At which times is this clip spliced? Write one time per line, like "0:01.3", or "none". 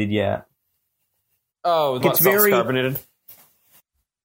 0:02.0